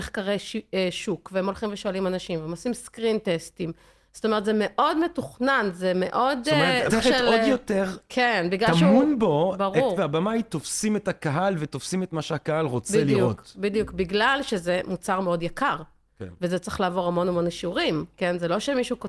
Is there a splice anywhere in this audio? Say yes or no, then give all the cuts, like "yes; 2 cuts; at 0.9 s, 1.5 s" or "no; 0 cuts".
yes; 2 cuts; at 6.9 s, 10.0 s